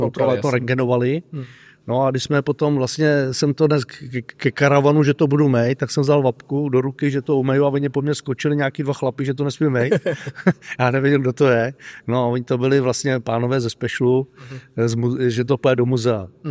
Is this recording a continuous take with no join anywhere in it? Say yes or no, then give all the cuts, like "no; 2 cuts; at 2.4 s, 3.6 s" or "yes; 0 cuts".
yes; 0 cuts